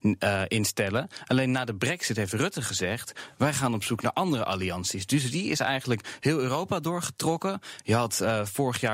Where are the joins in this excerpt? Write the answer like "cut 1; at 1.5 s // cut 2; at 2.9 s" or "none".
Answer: none

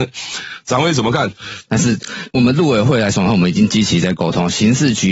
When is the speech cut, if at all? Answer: cut 1; at 1.7 s

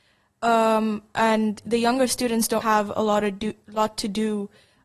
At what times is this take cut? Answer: cut 1; at 2.6 s

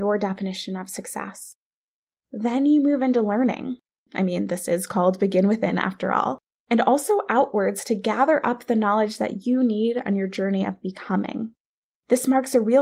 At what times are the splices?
cut 1; at 4.1 s

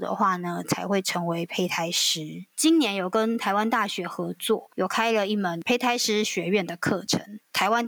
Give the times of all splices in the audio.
cut 1; at 2.5 s

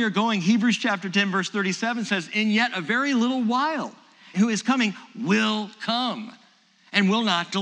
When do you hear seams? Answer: cut 1; at 4.3 s

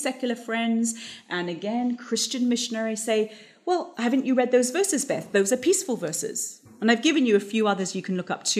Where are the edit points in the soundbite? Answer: none

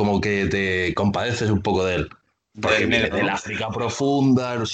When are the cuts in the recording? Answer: none

